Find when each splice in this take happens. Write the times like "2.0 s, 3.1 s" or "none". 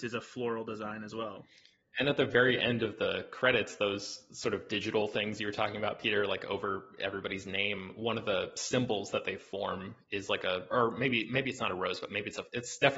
10.7 s